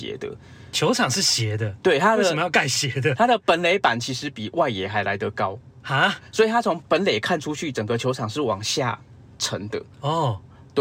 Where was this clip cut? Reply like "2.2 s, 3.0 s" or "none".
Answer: 6.8 s